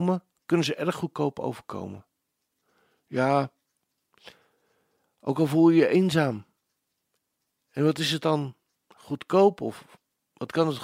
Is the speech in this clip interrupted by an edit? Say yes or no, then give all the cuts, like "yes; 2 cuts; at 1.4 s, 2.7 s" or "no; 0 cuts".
no; 0 cuts